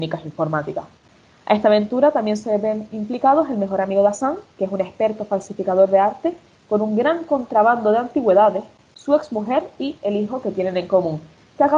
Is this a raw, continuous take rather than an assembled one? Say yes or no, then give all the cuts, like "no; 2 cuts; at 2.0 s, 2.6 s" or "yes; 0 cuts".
yes; 0 cuts